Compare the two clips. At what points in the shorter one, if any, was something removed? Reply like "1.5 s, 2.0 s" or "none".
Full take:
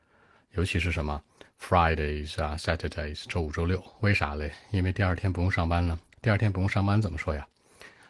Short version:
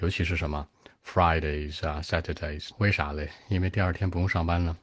2.7 s